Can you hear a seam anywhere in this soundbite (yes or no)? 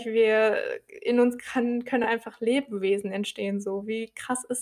no